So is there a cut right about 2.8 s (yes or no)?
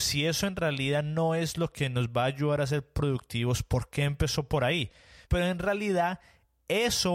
no